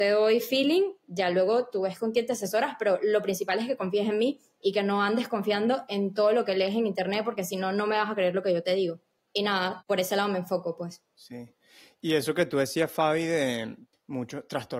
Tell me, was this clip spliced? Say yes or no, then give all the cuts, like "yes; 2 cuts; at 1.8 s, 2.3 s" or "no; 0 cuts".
yes; 1 cut; at 9.2 s